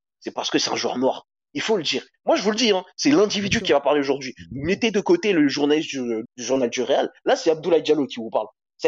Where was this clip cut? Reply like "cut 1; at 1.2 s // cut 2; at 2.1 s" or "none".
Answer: cut 1; at 6.3 s